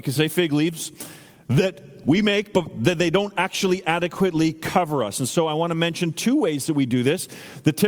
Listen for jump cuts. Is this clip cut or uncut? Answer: uncut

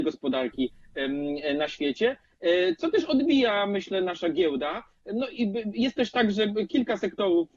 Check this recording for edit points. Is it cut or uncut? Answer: uncut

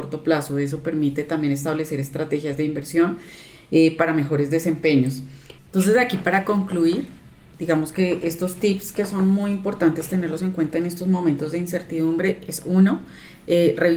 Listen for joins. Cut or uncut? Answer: cut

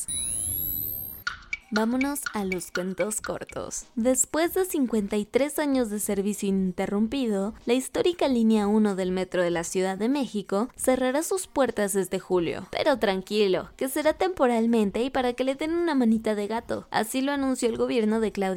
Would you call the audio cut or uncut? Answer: uncut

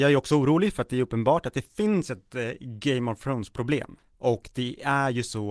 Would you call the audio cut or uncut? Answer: uncut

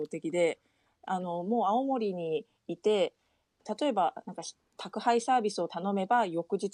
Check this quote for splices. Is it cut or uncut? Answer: uncut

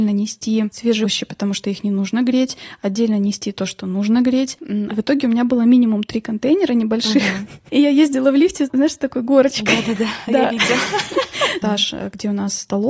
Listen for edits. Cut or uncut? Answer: cut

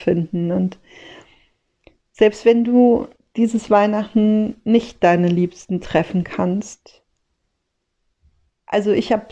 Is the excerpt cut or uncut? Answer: uncut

